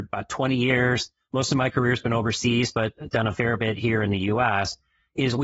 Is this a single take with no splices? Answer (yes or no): yes